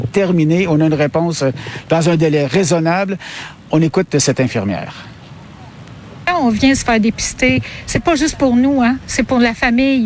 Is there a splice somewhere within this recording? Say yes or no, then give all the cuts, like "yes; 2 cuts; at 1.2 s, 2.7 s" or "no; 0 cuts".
no; 0 cuts